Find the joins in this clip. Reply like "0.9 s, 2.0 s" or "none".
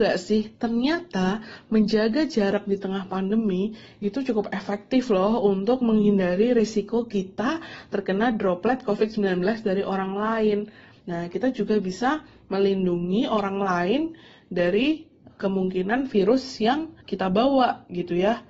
11.0 s, 17.0 s